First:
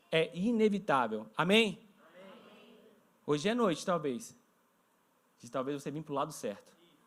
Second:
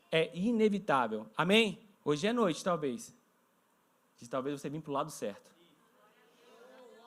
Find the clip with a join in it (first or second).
second